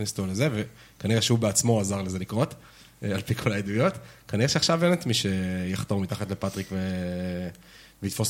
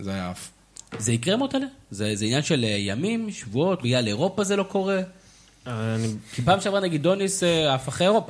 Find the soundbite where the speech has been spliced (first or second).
second